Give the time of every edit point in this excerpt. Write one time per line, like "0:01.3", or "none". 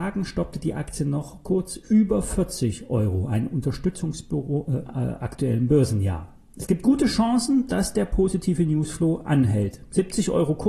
0:04.9